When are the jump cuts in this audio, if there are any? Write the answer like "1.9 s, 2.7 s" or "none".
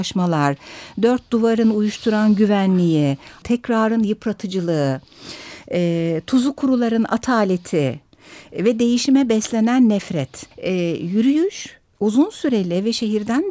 3.4 s, 10.5 s

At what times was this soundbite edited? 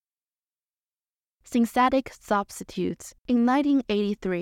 3.2 s

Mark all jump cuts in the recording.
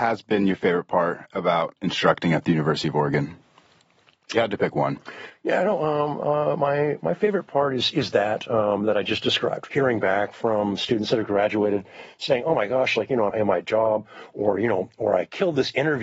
9.7 s, 13.3 s

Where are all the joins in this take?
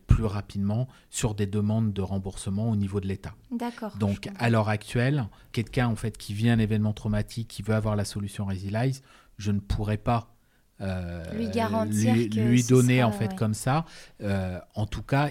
none

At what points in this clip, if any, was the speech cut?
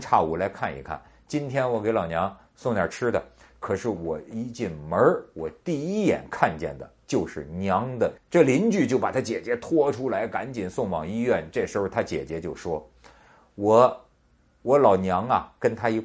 8.2 s

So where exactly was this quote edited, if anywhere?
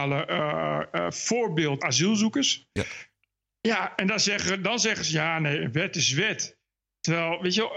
1.8 s

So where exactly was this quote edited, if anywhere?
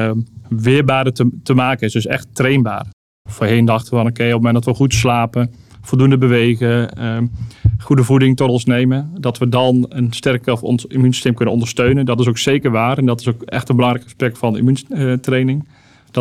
none

